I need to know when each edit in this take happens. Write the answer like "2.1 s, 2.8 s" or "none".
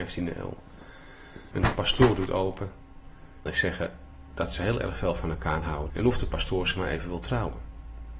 1.5 s, 3.5 s, 5.9 s